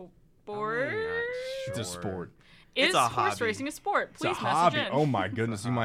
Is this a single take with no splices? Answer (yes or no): yes